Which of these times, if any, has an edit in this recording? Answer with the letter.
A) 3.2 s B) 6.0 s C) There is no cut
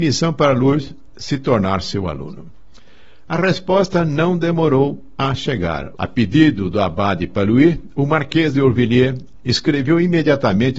B